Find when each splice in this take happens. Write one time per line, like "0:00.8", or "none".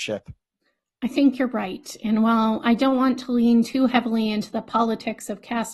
none